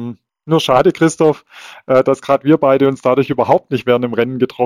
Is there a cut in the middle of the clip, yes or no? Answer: no